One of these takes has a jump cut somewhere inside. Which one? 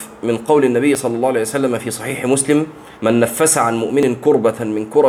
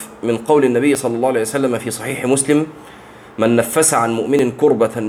first; 1 cut; at 2.9 s

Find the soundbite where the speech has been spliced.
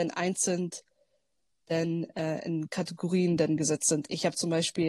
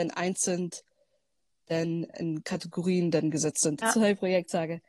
second; 2 cuts; at 2.1 s, 3.8 s

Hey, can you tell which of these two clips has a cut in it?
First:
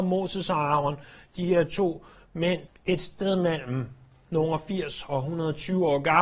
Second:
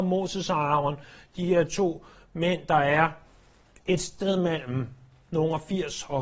first; 1 cut; at 2.7 s

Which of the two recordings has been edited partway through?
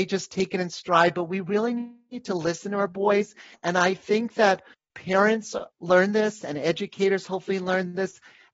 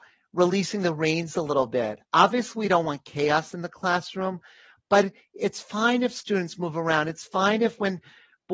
first; 1 cut; at 3.5 s

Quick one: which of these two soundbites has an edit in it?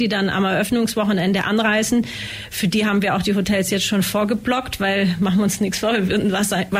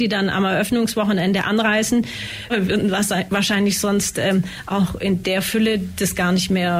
second; 1 cut; at 2.5 s

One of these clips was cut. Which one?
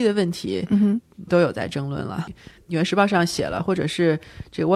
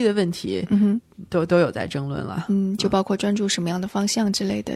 first; 2 cuts; at 1.3 s, 2.3 s

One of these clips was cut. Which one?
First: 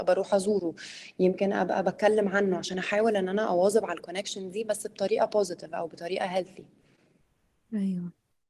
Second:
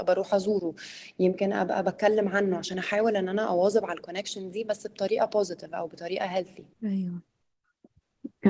second; 1 cut; at 6.7 s

